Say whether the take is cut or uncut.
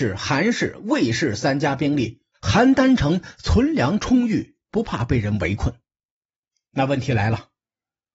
cut